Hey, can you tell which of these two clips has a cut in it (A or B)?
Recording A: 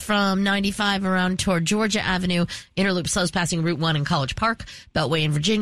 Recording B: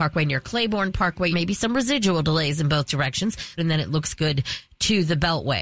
B